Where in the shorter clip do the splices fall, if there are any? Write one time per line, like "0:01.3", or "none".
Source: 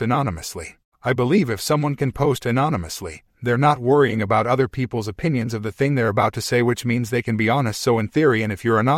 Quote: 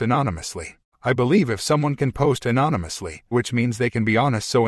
0:03.3